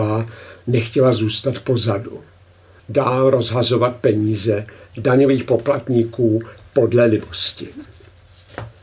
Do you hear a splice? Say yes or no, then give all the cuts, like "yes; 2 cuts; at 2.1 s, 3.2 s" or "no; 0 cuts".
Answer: yes; 1 cut; at 2.8 s